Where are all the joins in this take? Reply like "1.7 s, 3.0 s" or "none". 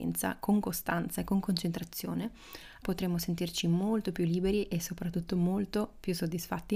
2.8 s